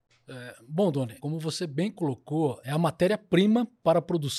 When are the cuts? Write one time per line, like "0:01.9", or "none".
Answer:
0:01.2
0:02.6